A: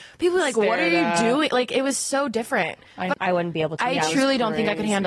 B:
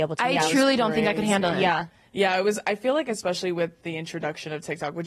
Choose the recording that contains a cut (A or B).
A